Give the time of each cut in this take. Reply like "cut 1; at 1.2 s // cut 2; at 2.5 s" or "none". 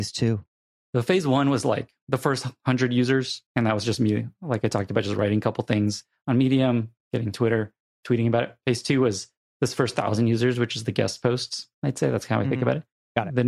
none